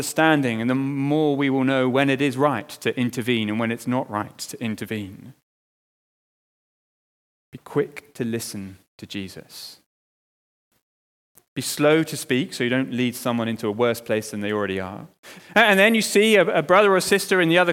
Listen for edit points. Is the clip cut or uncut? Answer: cut